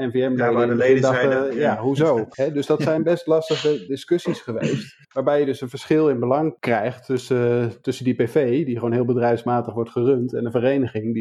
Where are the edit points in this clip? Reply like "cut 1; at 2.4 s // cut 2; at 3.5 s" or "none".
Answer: cut 1; at 5.0 s